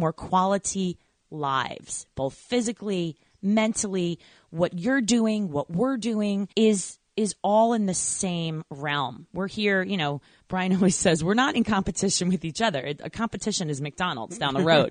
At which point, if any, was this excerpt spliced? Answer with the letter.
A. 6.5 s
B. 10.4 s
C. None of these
A